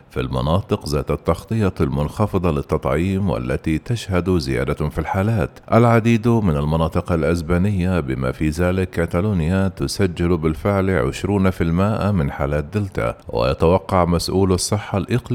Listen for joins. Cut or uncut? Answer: cut